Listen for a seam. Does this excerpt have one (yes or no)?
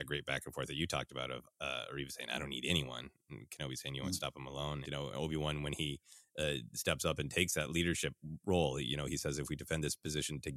yes